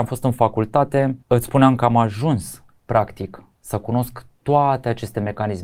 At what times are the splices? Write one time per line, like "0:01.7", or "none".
0:01.2